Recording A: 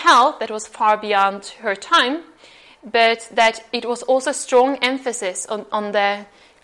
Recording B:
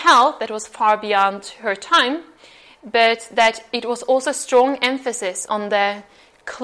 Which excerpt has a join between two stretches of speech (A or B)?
B